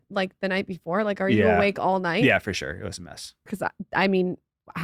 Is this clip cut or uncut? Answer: cut